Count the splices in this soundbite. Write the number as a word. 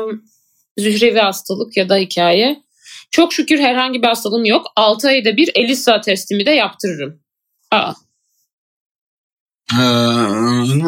one